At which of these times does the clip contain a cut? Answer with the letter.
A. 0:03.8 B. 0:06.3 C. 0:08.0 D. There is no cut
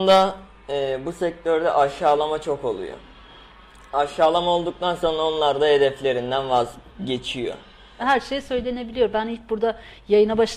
C